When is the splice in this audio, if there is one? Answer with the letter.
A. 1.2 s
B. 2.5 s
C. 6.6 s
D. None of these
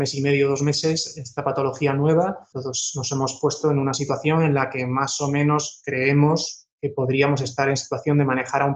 B